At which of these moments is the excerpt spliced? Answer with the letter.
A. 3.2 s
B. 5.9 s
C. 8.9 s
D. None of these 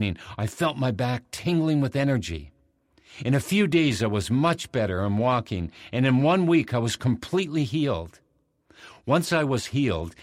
D